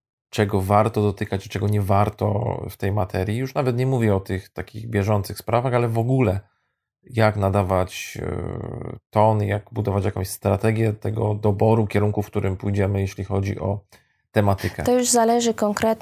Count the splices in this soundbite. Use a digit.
0